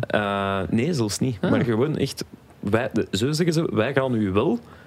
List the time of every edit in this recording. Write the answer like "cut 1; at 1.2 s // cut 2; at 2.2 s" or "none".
none